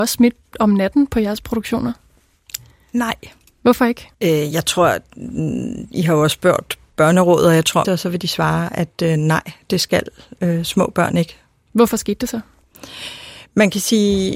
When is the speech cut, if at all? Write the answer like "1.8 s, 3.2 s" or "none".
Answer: 4.1 s, 7.8 s